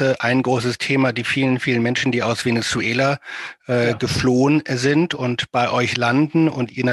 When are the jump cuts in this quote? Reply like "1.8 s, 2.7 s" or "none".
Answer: none